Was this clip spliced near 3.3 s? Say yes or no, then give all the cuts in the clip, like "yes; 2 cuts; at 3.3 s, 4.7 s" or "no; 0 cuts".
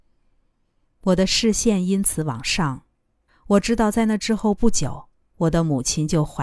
yes; 1 cut; at 3.3 s